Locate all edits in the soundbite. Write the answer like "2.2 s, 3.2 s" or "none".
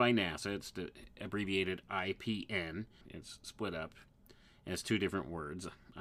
3.0 s